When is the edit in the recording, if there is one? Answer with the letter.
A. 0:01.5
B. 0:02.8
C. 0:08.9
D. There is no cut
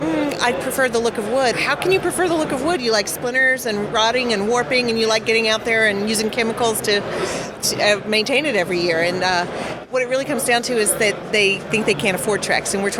A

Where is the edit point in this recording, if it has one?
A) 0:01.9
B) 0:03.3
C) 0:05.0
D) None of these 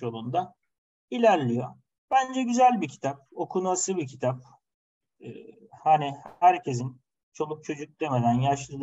D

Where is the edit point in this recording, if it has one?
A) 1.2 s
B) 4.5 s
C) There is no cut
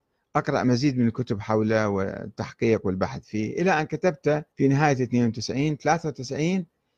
B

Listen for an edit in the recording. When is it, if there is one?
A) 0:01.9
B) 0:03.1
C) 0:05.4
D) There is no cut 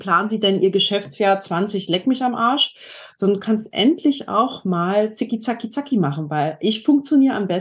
D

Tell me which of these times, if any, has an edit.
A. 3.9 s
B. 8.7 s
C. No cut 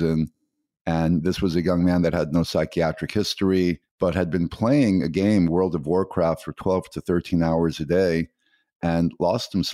A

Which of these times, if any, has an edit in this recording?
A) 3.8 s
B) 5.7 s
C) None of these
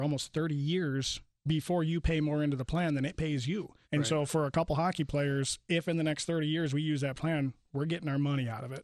A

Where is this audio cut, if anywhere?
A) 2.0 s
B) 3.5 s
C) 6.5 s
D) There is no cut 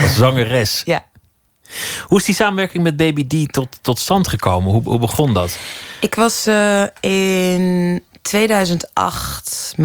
D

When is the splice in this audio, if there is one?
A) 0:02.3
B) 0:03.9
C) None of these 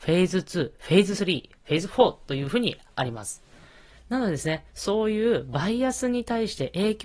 B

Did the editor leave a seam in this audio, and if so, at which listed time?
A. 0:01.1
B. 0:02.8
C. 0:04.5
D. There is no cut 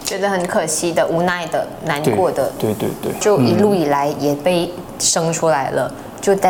D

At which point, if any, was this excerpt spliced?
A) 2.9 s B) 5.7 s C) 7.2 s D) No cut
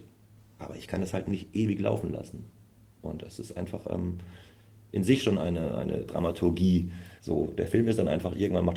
C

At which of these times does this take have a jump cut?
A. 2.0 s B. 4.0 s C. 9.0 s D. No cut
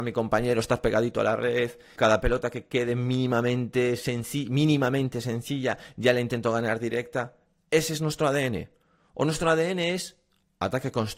A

